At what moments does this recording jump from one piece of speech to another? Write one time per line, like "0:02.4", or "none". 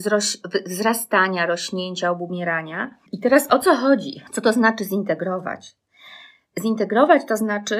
0:03.1
0:04.3